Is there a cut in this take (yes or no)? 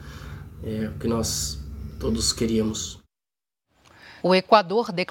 yes